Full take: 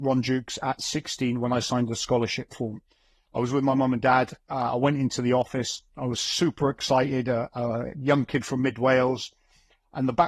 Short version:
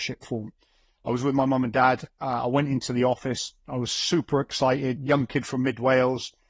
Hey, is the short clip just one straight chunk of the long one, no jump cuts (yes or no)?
no